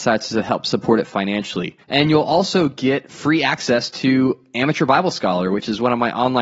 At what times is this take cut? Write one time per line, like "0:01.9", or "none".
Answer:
0:01.8